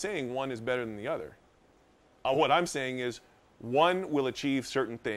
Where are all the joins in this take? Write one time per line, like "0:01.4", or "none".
none